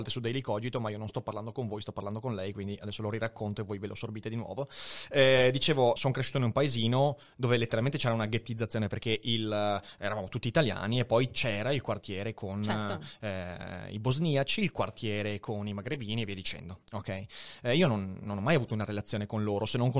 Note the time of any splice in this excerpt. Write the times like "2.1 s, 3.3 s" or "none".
6.0 s